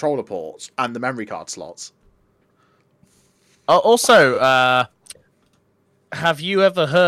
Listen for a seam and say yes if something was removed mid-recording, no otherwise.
no